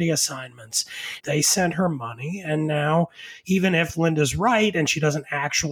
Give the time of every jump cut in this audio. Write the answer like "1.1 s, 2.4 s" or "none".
1.2 s